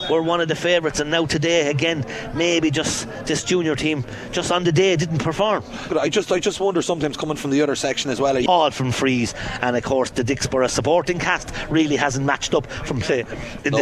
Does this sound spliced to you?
yes; 2 cuts; at 5.9 s, 8.5 s

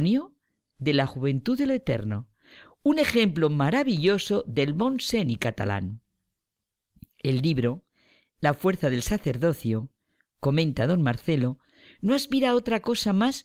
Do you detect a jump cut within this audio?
no; 0 cuts

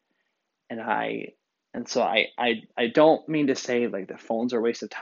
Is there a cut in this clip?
no; 0 cuts

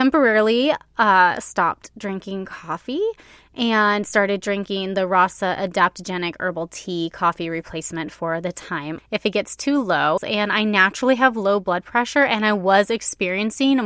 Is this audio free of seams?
no; 2 cuts; at 9.0 s, 10.2 s

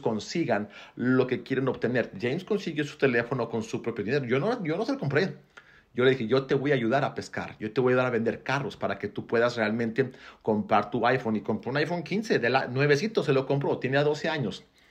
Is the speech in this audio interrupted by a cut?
no; 0 cuts

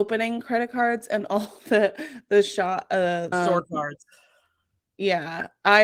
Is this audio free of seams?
no; 1 cut; at 3.3 s

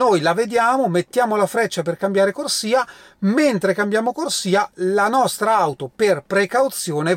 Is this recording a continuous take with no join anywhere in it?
yes; 0 cuts

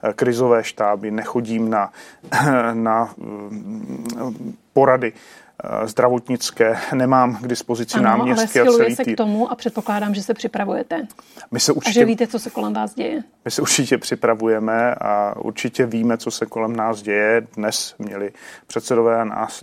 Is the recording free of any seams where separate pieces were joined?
yes; 0 cuts

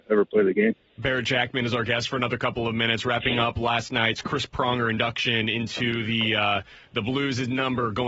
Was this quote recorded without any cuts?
yes; 0 cuts

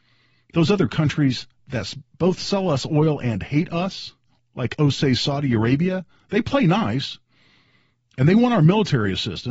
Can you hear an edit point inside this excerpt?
no; 0 cuts

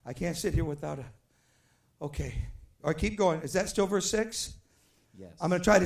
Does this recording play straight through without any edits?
yes; 0 cuts

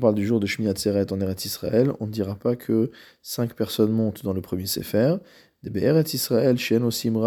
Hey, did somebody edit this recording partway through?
no; 0 cuts

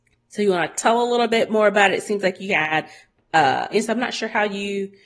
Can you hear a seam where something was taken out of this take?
yes; 1 cut; at 3.7 s

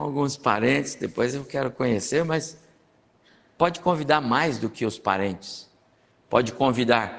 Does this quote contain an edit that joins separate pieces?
no; 0 cuts

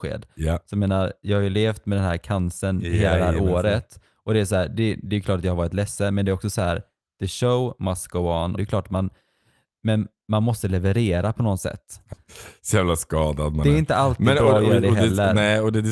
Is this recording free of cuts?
no; 2 cuts; at 8.6 s, 12.1 s

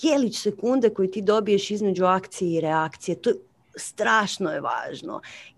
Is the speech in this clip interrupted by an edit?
no; 0 cuts

